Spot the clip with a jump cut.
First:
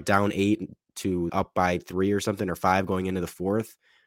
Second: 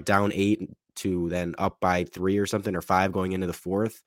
first; 1 cut; at 1.3 s

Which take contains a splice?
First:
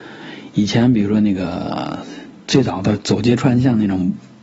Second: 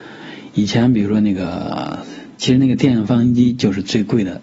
second; 1 cut; at 2.3 s

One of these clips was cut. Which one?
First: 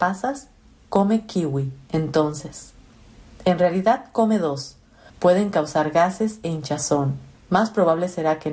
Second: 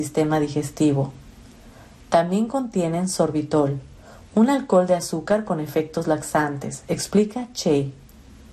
first; 2 cuts; at 5.1 s, 7.3 s

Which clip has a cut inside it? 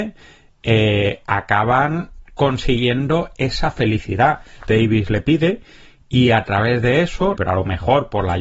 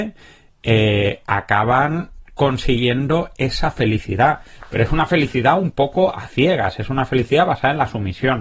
first; 2 cuts; at 4.7 s, 7.3 s

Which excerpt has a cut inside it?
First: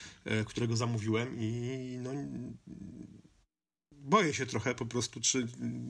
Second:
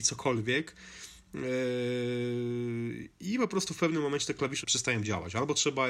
second; 1 cut; at 4.6 s

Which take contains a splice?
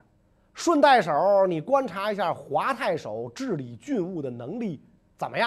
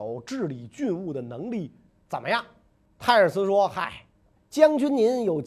second; 2 cuts; at 2.9 s, 4.3 s

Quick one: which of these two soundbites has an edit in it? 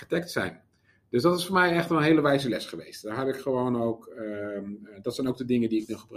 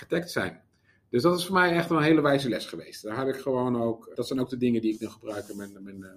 second; 1 cut; at 4.1 s

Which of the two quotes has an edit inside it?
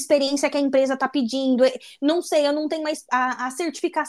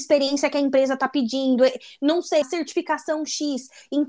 second; 1 cut; at 2.4 s

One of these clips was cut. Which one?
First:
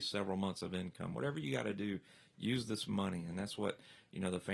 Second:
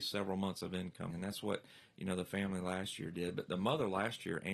second; 1 cut; at 1.1 s

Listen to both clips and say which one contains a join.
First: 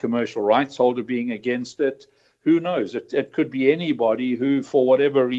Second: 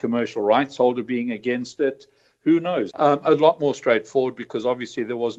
second; 1 cut; at 2.9 s

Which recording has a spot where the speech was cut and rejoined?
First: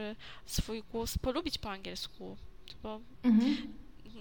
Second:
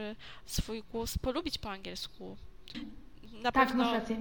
second; 1 cut; at 2.7 s

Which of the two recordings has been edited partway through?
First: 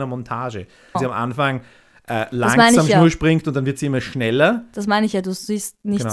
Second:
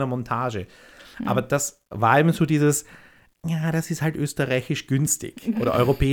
first; 1 cut; at 0.9 s

